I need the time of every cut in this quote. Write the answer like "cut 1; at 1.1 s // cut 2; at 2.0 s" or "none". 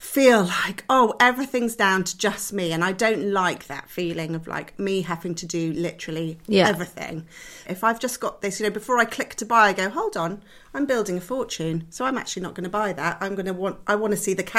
cut 1; at 7.6 s

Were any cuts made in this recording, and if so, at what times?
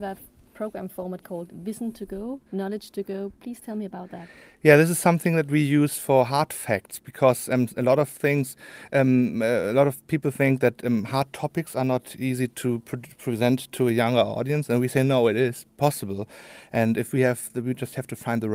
cut 1; at 2.5 s

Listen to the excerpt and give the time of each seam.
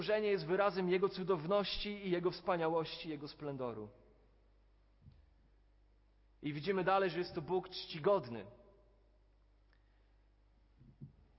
none

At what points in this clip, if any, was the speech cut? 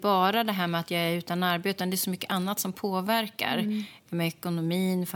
none

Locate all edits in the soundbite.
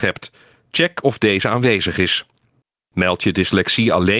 none

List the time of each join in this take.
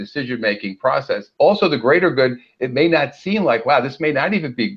none

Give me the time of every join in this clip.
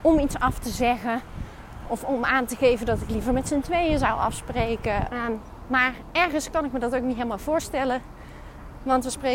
cut 1; at 5.1 s

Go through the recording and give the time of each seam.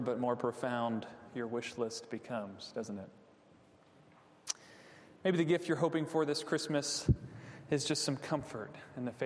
none

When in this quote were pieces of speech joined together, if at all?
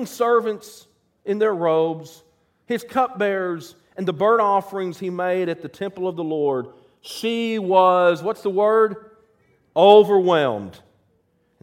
none

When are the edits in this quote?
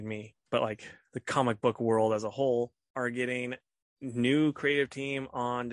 none

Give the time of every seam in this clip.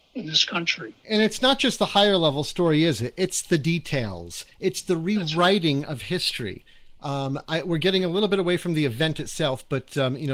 cut 1; at 1.0 s

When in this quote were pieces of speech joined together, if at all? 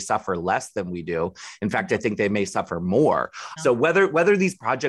cut 1; at 3.6 s

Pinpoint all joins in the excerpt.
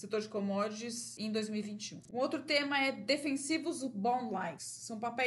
cut 1; at 2.1 s

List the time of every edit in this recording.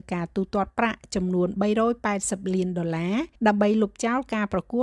cut 1; at 3.3 s

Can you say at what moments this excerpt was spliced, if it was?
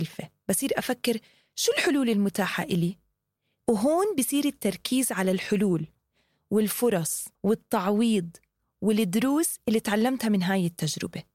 cut 1; at 3.6 s // cut 2; at 7.3 s

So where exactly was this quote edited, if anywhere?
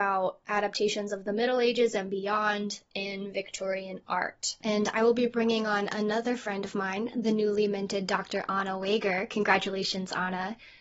none

